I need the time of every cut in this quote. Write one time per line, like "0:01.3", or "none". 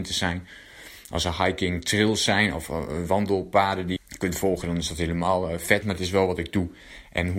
0:04.0
0:05.8